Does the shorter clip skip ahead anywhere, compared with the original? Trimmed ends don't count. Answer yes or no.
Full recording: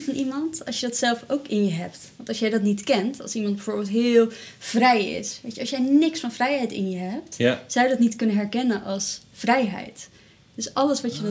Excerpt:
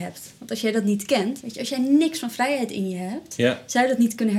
yes